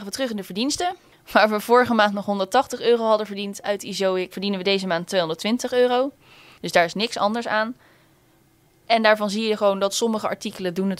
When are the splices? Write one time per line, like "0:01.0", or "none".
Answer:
0:04.3
0:06.5